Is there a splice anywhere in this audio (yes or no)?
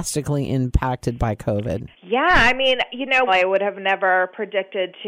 yes